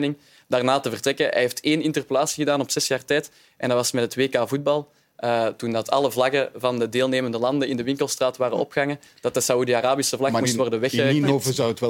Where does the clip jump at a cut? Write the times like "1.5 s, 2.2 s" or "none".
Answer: none